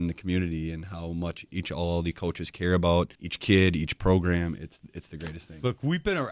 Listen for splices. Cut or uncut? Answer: cut